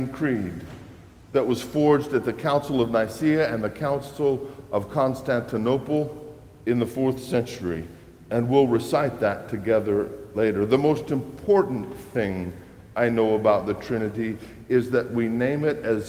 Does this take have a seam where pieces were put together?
no; 0 cuts

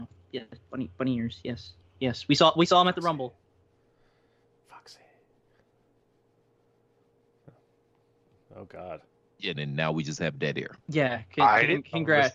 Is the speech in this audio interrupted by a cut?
yes; 2 cuts; at 9.5 s, 10.8 s

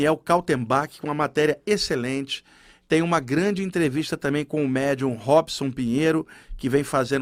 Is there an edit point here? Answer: no; 0 cuts

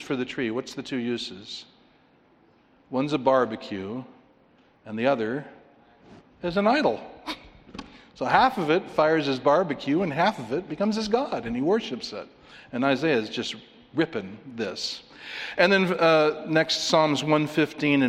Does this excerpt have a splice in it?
no; 0 cuts

